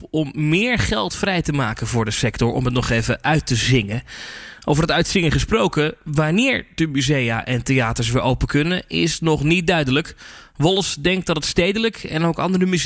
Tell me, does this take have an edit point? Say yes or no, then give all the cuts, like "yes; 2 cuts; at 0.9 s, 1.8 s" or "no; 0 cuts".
no; 0 cuts